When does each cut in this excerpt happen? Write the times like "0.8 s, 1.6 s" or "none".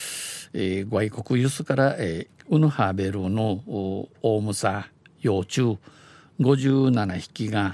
2.3 s

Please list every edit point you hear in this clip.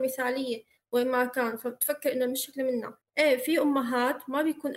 3.0 s

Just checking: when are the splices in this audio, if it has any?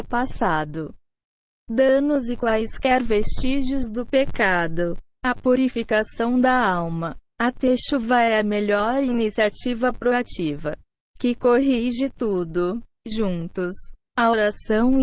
5.1 s, 7.2 s

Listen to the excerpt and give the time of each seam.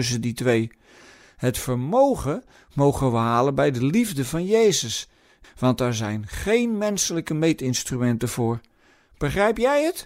5.4 s

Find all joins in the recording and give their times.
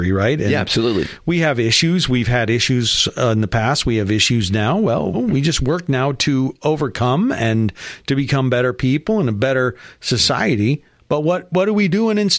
5.1 s

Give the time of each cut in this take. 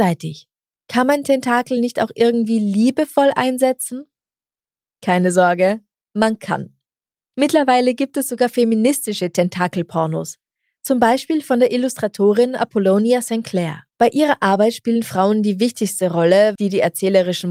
13.9 s, 16.6 s

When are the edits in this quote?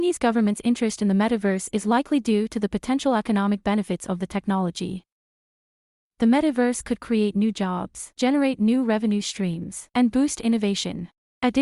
none

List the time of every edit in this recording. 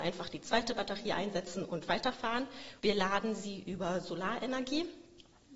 2.8 s

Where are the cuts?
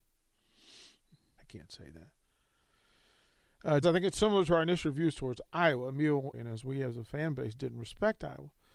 1.4 s, 3.8 s, 6.3 s

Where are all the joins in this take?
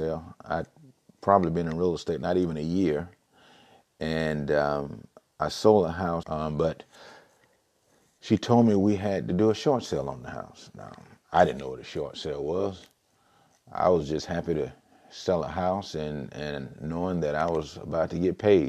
6.2 s

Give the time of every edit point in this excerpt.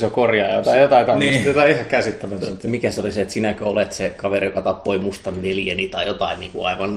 none

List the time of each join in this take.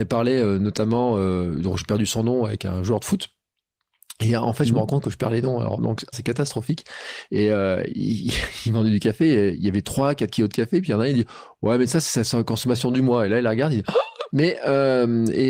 6.1 s, 7.3 s, 14.3 s

